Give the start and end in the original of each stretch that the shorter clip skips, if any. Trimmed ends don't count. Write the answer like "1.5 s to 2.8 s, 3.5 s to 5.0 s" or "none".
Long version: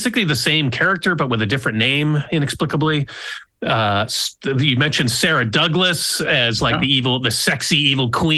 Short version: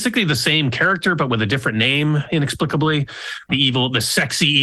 3.5 s to 6.8 s